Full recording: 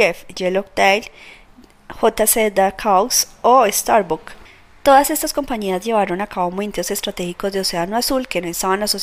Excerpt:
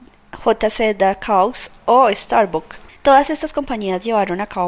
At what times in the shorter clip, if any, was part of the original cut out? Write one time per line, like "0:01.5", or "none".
0:03.0